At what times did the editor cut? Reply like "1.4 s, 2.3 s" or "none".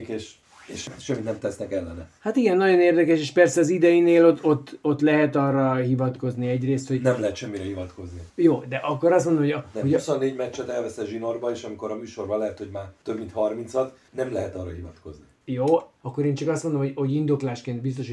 none